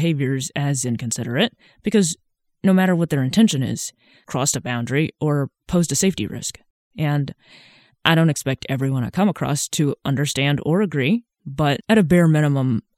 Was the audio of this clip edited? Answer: yes; 1 cut; at 4.2 s

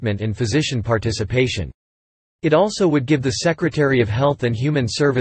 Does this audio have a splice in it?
no; 0 cuts

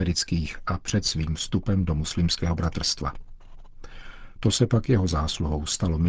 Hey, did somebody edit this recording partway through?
no; 0 cuts

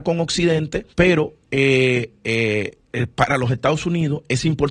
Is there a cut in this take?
yes; 1 cut; at 0.9 s

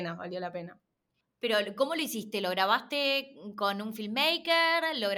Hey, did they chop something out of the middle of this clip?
no; 0 cuts

